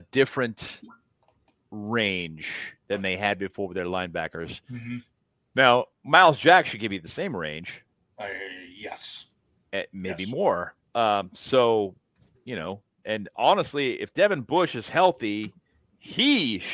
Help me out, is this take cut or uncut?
uncut